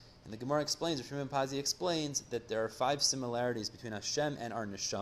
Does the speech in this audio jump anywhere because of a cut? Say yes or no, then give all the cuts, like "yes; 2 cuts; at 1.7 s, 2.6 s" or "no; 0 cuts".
no; 0 cuts